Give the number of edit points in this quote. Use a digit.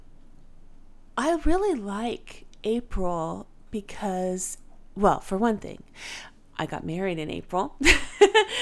0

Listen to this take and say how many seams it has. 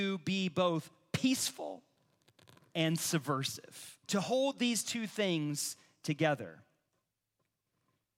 1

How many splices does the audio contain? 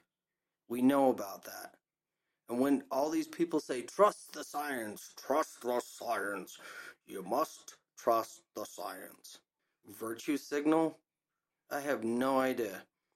1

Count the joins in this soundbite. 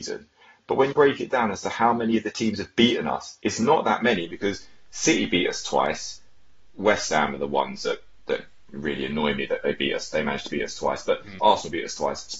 2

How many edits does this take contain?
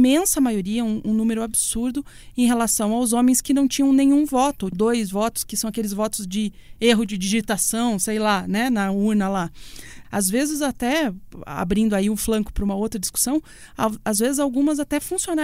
2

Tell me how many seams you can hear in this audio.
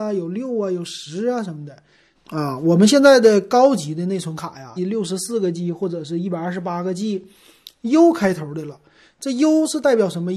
2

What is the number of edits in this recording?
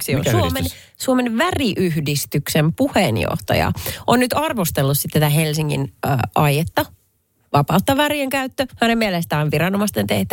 0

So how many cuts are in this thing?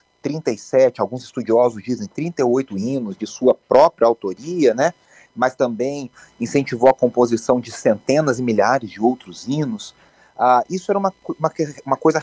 0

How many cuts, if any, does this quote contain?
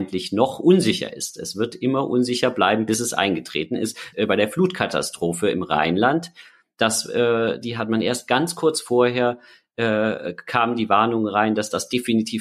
1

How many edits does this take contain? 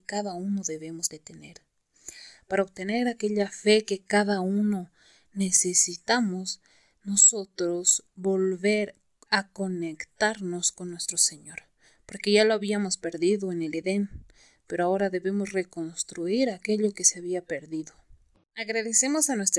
1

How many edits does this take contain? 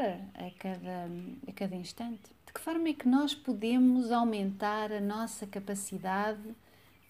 1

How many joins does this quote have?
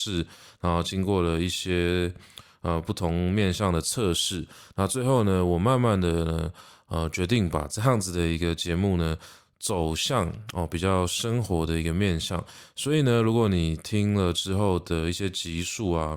0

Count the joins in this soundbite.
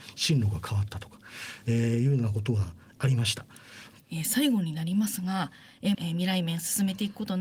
2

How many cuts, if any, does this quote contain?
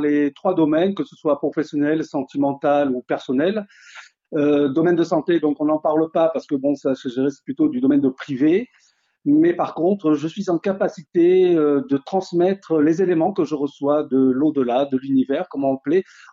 0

